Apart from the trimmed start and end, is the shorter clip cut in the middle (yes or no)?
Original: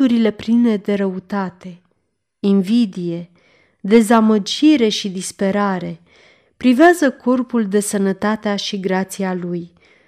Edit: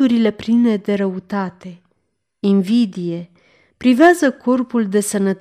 yes